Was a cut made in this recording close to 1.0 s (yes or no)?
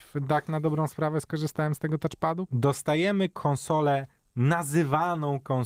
no